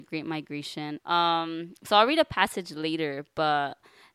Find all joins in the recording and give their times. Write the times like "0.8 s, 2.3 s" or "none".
1.0 s

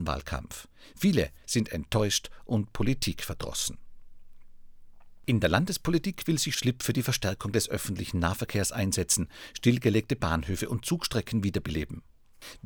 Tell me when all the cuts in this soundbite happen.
1.4 s

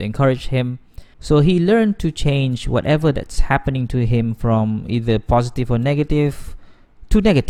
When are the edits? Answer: 1.1 s

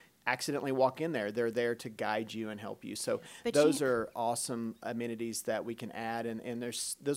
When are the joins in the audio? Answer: none

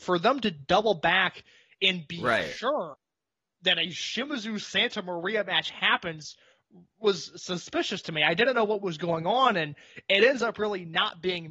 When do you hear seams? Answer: none

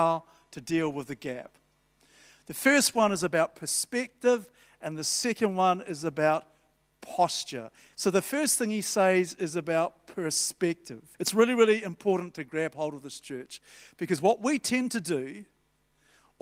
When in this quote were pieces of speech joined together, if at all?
7.9 s, 11.1 s

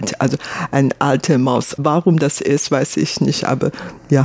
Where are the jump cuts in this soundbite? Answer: 1.8 s

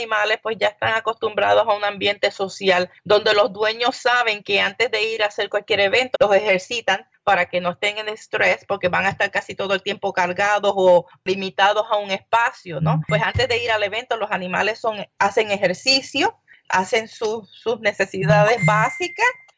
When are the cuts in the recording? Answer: 6.1 s

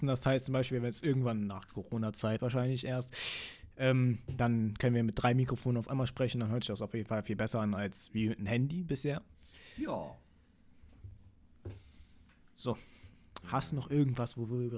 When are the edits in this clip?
2.4 s

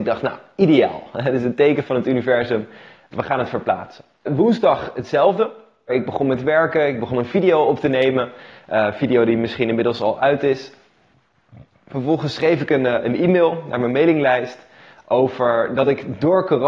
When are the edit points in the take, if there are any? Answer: 4.3 s, 5.9 s

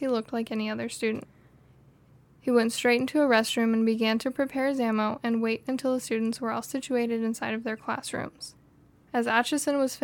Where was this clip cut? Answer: none

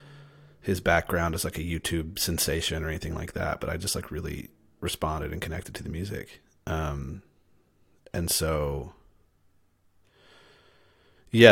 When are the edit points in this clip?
none

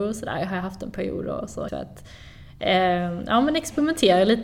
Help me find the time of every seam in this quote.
1.7 s

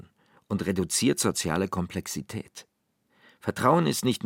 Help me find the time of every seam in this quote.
none

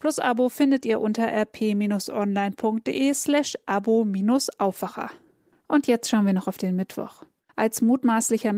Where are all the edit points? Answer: 7.5 s

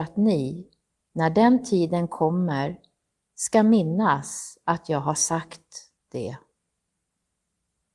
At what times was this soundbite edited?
none

